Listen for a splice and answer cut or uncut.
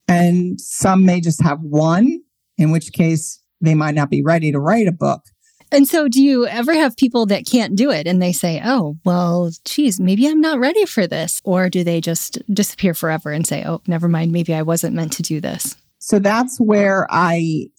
cut